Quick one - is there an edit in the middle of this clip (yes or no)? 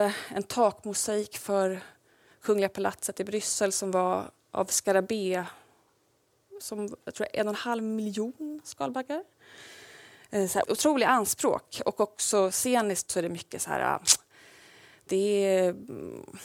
yes